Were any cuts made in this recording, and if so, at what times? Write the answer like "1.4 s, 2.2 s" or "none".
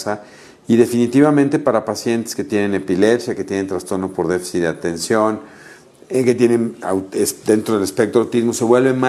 none